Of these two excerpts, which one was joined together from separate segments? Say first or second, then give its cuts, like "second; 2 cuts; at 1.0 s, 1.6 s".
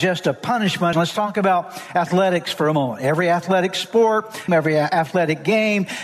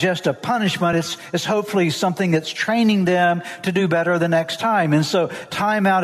first; 2 cuts; at 0.9 s, 4.5 s